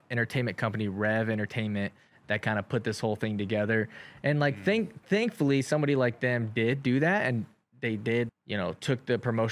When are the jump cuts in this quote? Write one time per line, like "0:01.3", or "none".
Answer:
0:08.3